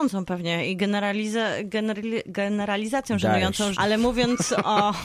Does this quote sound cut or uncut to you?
cut